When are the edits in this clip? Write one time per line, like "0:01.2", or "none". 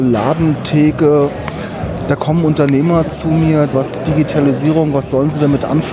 0:03.7